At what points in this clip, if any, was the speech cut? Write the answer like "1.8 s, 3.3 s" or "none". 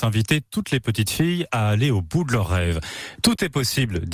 none